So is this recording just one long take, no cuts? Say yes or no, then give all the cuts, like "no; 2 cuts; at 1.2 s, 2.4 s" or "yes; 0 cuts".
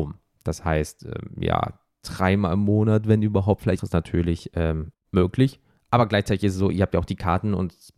no; 2 cuts; at 3.8 s, 4.9 s